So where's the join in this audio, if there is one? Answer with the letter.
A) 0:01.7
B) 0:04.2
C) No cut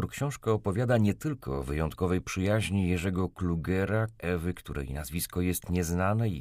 B